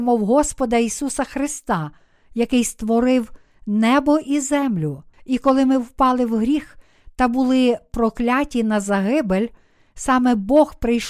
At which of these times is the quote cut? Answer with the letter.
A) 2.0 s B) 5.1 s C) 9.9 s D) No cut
B